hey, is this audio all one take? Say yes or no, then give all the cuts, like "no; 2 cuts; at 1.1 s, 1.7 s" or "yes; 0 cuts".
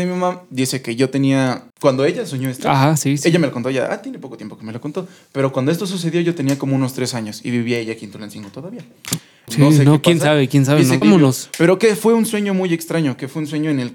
no; 3 cuts; at 1.7 s, 9.5 s, 11.0 s